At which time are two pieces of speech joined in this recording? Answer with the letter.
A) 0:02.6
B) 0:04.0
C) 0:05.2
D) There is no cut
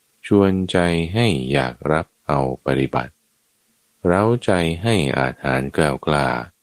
A